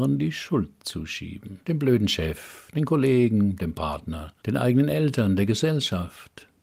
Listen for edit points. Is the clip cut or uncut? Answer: cut